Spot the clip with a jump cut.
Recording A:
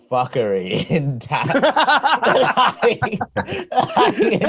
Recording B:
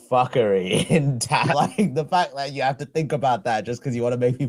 B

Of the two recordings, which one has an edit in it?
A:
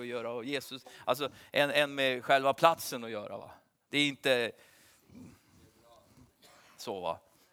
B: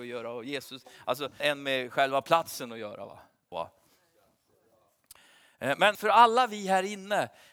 B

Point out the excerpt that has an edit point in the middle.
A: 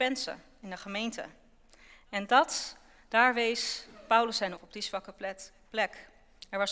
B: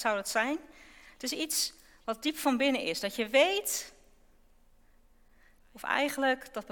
A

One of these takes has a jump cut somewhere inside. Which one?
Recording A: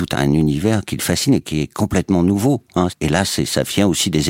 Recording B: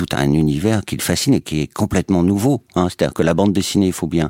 A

